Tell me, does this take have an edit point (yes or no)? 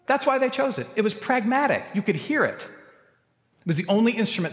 yes